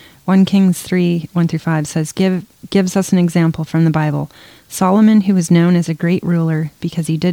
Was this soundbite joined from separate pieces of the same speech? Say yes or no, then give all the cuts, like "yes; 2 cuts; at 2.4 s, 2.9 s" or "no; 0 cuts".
no; 0 cuts